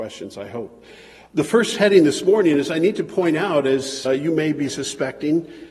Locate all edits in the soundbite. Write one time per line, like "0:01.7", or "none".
0:04.1